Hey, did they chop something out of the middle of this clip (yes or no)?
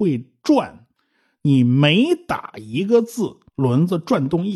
yes